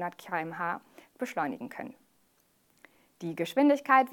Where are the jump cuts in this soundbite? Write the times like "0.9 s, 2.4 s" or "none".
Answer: none